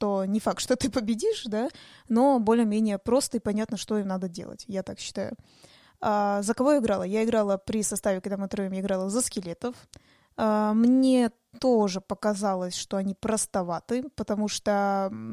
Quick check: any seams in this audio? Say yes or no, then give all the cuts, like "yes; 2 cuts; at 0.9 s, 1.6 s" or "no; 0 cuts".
no; 0 cuts